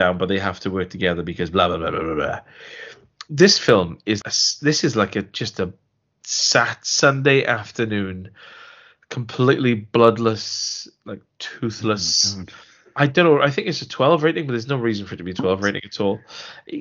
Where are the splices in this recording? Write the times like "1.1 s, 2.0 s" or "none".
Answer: 4.2 s